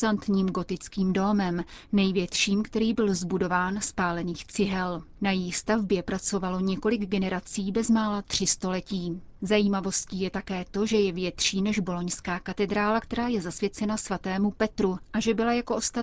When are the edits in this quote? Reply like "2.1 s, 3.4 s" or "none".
5.2 s